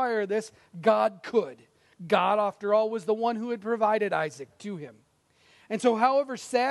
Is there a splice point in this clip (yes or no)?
no